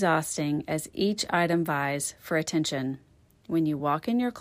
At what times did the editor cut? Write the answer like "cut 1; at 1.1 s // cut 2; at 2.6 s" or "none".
cut 1; at 3.3 s

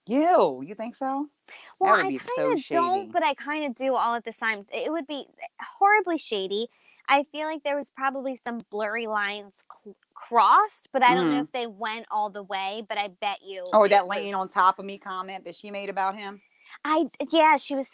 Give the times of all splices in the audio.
none

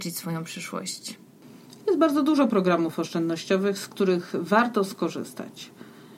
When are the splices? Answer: none

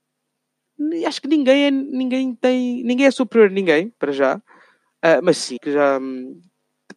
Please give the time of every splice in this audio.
cut 1; at 5.6 s

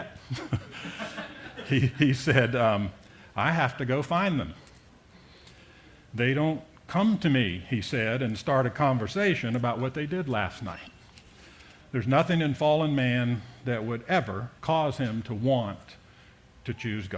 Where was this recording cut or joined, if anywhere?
cut 1; at 11.8 s // cut 2; at 14.6 s

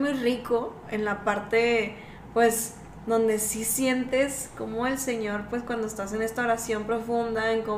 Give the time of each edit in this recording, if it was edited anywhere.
none

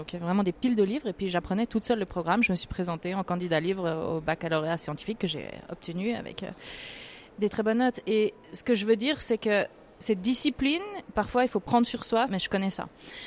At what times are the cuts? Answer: cut 1; at 12.3 s

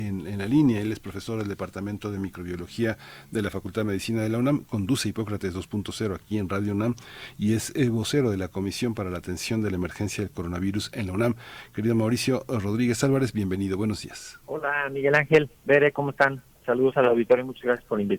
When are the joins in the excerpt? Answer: cut 1; at 14.4 s

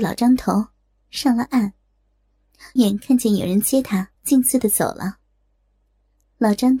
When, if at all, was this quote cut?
cut 1; at 2.8 s // cut 2; at 4.1 s

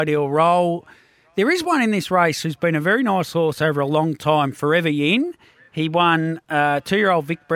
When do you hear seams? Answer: none

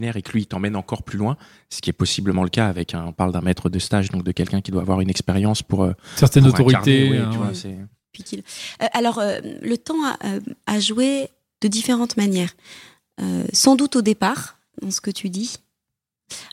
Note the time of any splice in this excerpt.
none

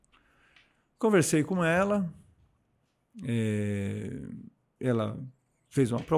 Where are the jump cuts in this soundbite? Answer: none

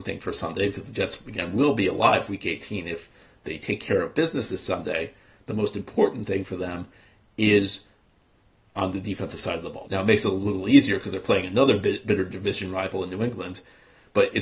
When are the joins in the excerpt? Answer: cut 1; at 9.8 s

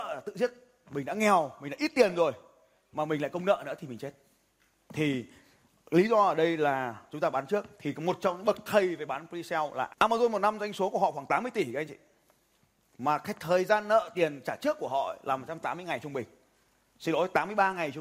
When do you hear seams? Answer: cut 1; at 9.9 s

